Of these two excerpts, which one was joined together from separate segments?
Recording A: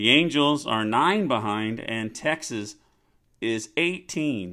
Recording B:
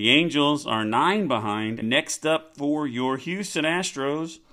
B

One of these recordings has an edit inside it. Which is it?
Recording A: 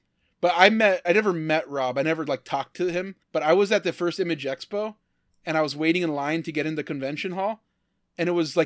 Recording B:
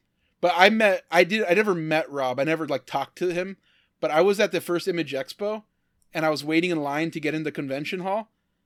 A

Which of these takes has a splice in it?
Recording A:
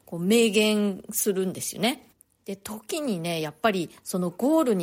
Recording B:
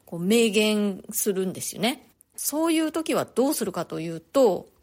B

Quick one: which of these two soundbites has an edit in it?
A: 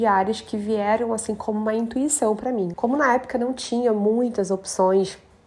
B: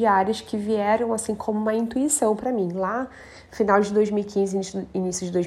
A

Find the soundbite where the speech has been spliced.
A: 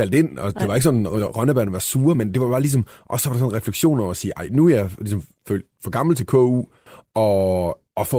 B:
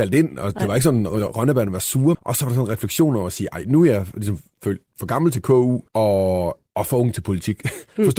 B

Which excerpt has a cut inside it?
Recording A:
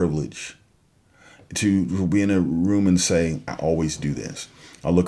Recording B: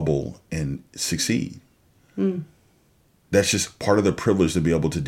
A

